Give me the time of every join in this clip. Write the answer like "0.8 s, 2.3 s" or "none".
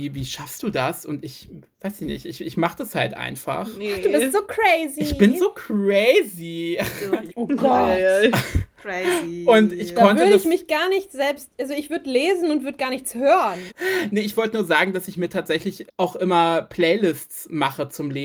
7.3 s, 13.7 s, 15.9 s